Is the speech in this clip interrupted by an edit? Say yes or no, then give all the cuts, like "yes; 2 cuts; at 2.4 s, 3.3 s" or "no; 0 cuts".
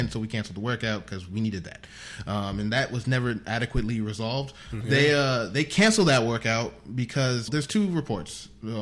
yes; 2 cuts; at 4.8 s, 7.5 s